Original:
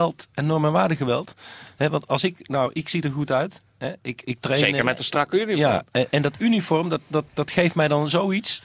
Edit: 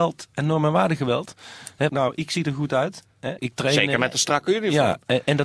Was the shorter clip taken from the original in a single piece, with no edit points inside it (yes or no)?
no